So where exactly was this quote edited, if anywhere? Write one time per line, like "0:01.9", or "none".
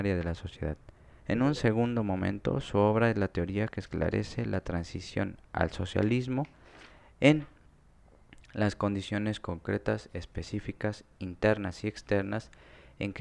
0:01.2